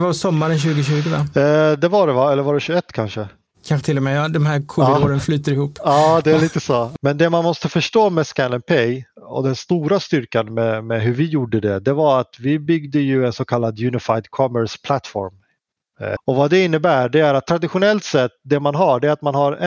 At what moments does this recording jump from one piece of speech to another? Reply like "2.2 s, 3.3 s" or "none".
7.0 s, 16.2 s